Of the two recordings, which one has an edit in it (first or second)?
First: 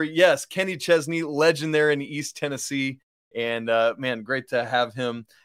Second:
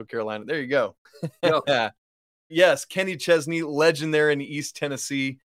second